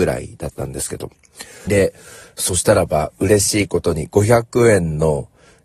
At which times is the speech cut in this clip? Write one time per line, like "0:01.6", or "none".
0:01.7